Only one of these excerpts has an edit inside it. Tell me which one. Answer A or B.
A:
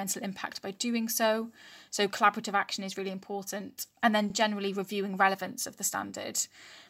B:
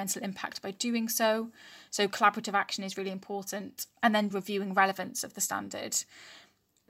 B